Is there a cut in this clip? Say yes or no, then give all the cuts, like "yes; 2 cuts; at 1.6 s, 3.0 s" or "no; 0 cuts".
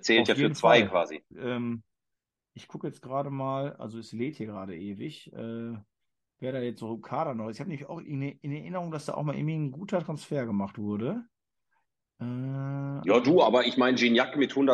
yes; 1 cut; at 1.3 s